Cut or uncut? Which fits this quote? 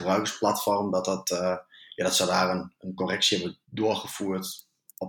cut